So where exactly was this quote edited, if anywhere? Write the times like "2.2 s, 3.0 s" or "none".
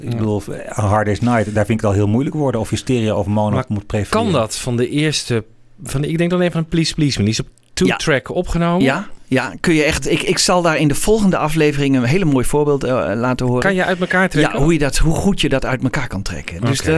none